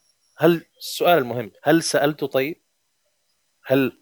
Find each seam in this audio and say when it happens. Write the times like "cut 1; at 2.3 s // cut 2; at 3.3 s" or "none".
cut 1; at 1.6 s